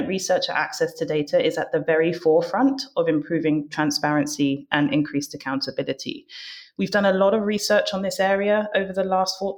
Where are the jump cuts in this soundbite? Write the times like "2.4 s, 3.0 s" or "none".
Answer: none